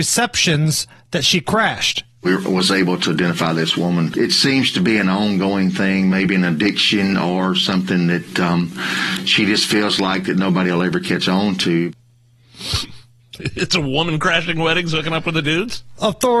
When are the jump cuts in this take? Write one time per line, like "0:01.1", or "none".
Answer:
0:13.4

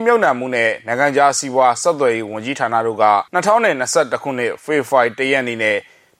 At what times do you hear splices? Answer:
0:03.3

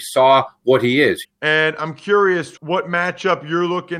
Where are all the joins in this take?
0:01.2
0:02.6

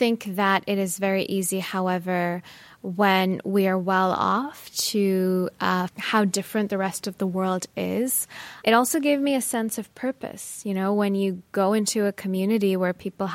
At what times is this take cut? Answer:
0:05.9
0:08.6

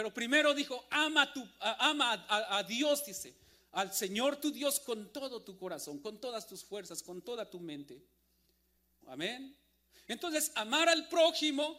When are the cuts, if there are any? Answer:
0:09.0

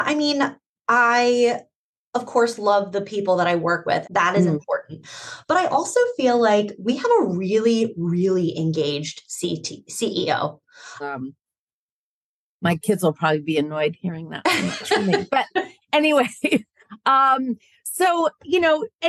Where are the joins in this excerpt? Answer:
0:04.0
0:11.0

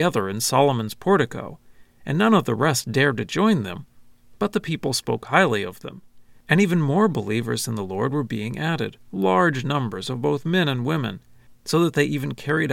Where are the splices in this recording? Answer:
none

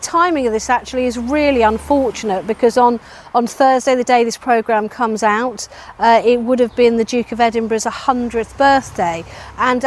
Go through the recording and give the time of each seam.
none

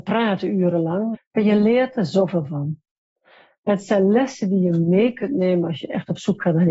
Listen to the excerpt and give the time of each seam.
0:01.1

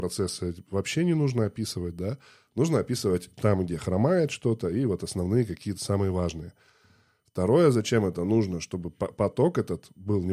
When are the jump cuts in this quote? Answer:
none

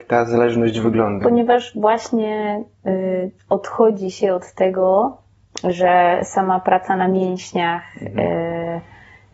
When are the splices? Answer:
0:01.2

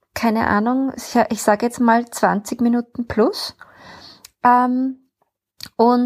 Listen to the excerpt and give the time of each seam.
none

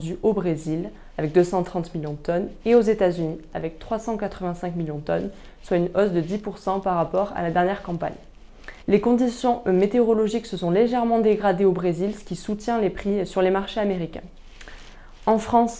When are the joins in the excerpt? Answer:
0:08.8

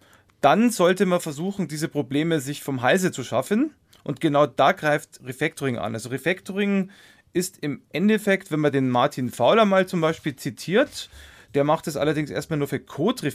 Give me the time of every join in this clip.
none

